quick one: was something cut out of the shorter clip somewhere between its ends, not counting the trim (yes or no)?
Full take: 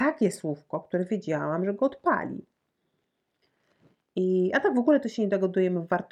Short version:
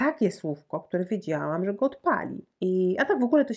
yes